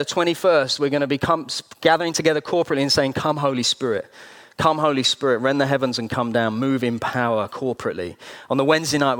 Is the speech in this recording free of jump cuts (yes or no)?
yes